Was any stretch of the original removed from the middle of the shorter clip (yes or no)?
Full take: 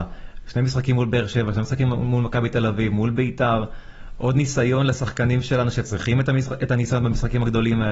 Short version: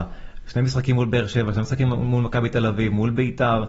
no